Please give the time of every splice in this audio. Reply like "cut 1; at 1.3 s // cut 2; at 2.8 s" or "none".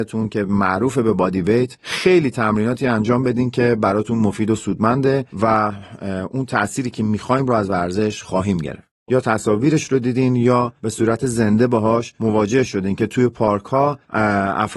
cut 1; at 9.1 s